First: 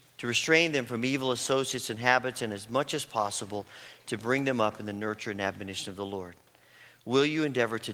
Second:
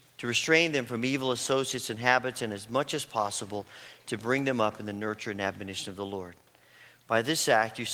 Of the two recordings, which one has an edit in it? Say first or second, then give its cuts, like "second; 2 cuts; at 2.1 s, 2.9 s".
second; 1 cut; at 7.0 s